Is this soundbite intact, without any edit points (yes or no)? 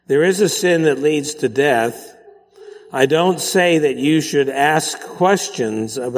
yes